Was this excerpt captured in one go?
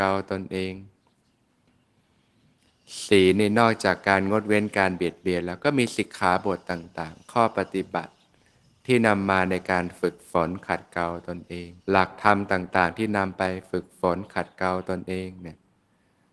no; 1 cut; at 11.8 s

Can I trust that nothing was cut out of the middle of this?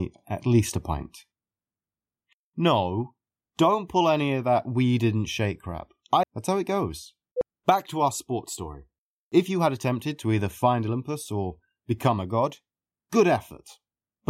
no; 1 cut; at 6.2 s

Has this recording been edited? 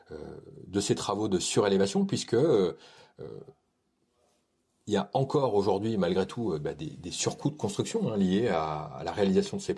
no; 0 cuts

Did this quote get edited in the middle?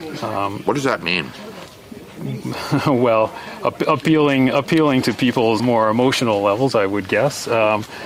yes; 1 cut; at 5.6 s

